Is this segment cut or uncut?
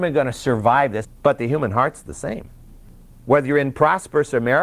cut